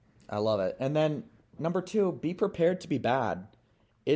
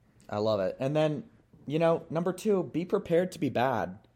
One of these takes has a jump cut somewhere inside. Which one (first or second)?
first